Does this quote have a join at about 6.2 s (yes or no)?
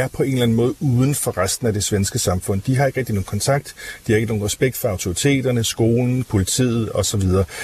yes